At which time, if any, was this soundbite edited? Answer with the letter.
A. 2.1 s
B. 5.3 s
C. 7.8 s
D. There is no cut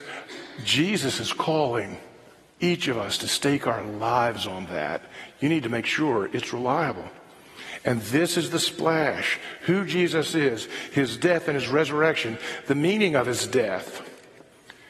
D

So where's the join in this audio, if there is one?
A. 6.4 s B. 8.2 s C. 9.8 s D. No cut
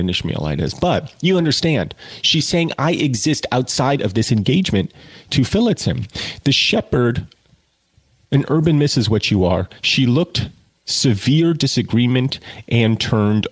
D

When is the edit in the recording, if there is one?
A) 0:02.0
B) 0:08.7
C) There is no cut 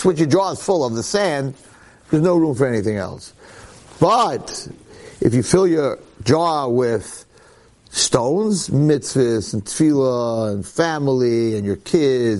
C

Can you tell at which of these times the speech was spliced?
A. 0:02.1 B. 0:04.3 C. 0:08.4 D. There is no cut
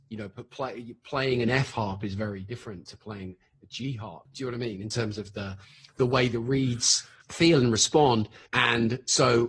C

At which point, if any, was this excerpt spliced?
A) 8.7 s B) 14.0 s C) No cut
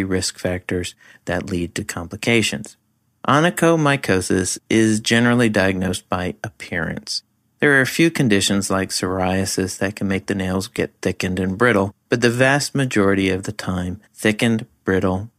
B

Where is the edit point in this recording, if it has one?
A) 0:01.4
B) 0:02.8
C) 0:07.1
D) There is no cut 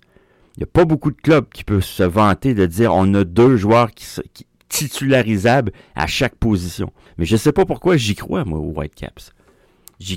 C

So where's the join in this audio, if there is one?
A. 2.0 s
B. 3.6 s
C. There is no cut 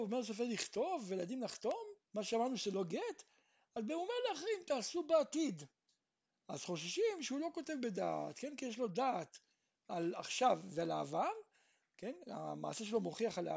A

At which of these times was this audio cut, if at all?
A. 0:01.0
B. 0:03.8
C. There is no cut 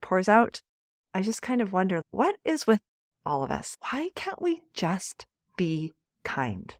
A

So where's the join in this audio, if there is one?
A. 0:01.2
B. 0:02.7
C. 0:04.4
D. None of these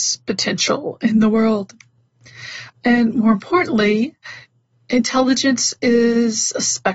B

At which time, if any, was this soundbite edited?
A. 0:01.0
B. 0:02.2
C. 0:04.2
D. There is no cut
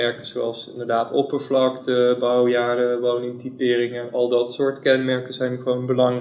D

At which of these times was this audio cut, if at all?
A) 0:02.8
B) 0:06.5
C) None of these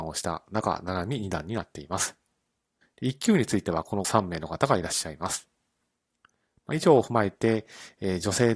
A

